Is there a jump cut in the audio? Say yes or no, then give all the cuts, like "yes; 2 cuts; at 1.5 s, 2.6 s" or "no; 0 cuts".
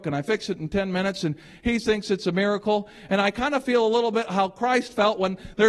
no; 0 cuts